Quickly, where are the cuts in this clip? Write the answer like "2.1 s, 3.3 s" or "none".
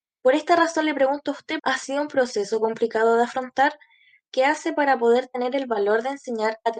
1.6 s